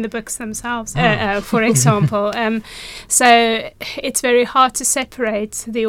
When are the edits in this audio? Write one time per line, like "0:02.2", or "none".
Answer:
0:00.9

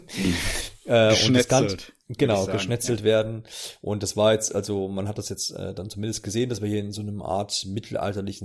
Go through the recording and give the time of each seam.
none

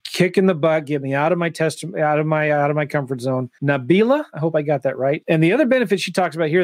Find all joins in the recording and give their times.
0:05.2

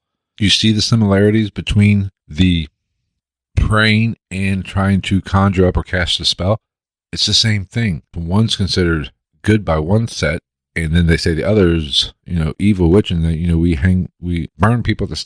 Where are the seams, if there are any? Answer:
0:02.2
0:08.1

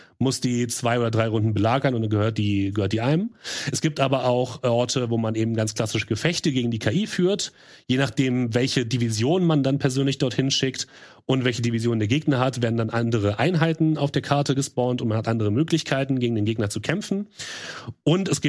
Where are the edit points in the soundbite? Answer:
none

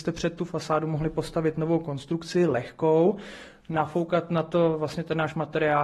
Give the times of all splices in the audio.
none

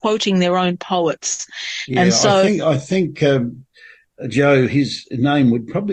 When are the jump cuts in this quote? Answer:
none

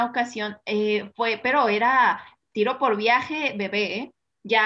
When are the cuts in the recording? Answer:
none

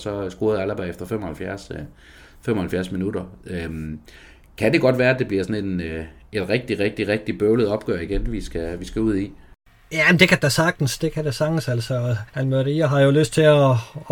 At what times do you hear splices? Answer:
0:12.3

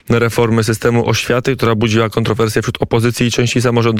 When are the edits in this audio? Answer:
none

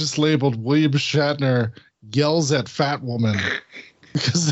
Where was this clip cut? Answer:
none

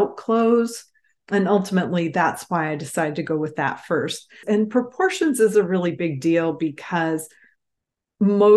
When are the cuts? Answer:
0:04.4

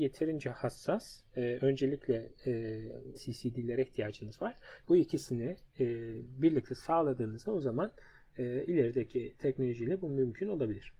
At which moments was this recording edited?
0:03.1
0:04.8

